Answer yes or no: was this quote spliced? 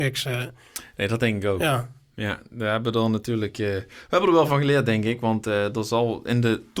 no